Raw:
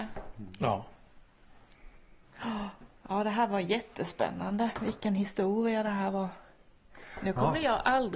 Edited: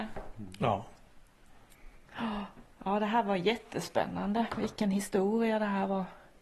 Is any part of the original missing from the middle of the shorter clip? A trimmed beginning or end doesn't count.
yes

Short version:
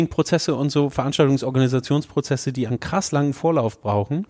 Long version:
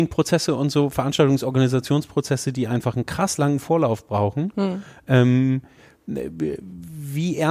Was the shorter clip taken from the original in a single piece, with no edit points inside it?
no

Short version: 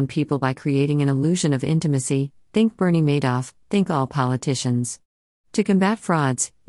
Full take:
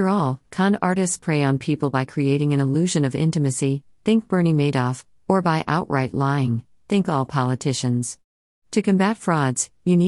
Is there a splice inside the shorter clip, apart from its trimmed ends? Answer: yes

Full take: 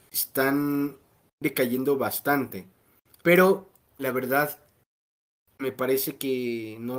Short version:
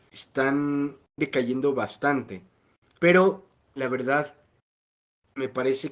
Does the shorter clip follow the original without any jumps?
no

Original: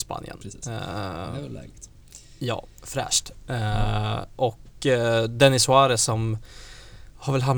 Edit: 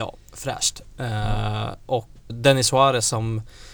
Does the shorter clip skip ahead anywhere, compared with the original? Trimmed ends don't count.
yes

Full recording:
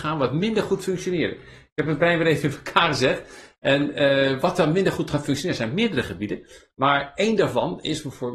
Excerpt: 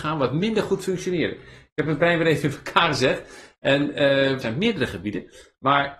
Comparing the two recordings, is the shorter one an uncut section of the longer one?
no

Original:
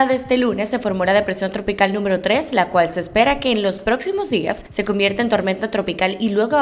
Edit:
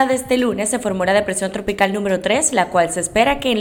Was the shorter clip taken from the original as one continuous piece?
yes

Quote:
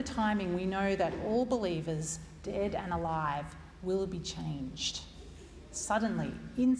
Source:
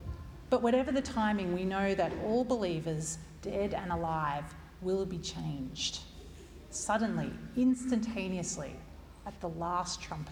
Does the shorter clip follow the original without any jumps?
yes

